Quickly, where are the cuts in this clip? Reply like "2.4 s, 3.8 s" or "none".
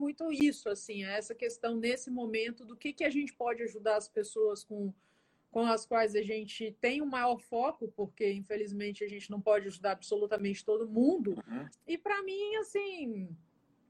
11.7 s